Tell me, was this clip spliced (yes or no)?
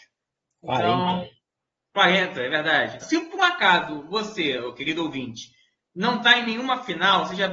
yes